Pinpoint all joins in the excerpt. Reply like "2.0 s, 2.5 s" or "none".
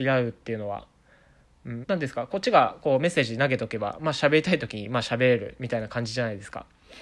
1.8 s